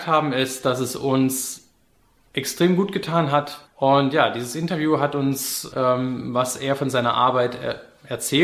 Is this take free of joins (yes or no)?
no